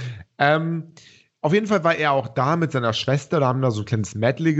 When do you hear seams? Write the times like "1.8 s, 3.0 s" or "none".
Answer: none